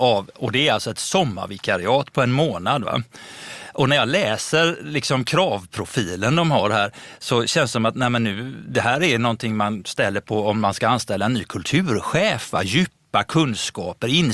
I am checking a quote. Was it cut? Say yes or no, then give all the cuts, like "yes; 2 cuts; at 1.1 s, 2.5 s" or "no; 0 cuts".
no; 0 cuts